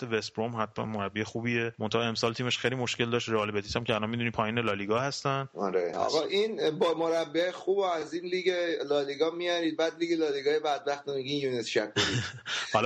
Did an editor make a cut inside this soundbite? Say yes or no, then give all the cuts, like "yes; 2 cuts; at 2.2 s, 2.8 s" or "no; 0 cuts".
yes; 1 cut; at 5.9 s